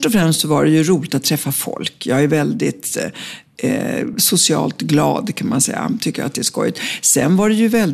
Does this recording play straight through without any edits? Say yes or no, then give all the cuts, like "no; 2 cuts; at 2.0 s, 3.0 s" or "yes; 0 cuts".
yes; 0 cuts